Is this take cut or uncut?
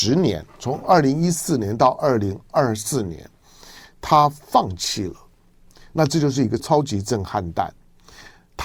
cut